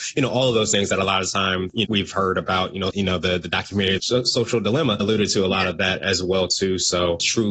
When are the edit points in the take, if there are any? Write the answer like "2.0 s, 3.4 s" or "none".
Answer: 1.8 s, 2.9 s, 4.0 s